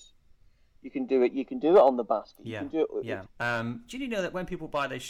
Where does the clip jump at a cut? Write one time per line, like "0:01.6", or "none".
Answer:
0:03.3